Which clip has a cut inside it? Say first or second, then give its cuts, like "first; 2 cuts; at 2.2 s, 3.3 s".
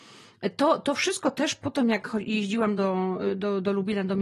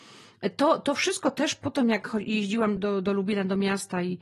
second; 1 cut; at 2.8 s